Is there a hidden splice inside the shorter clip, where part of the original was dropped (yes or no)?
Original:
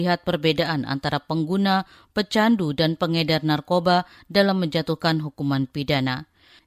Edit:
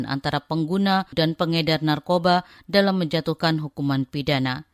yes